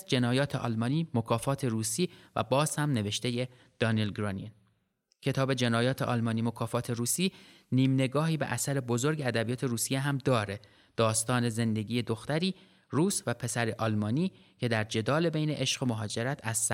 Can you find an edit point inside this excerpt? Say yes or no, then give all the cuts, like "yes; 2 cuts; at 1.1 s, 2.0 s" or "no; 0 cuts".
no; 0 cuts